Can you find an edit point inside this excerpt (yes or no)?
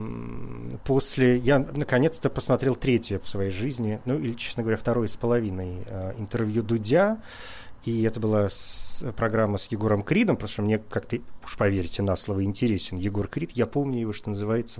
yes